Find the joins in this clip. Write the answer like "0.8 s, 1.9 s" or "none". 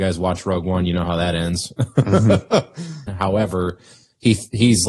3.1 s